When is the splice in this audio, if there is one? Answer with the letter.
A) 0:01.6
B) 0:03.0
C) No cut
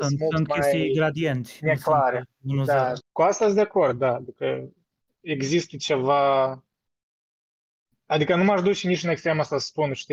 B